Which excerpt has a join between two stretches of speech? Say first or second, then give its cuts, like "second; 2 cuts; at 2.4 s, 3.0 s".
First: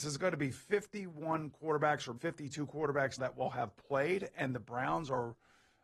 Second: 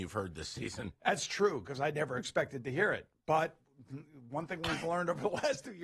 first; 2 cuts; at 2.2 s, 3.2 s